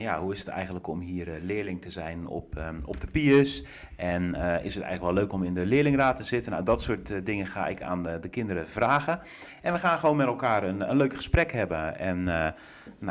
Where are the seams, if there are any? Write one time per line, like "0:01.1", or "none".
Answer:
none